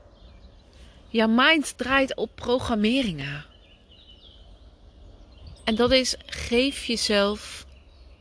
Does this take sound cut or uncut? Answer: cut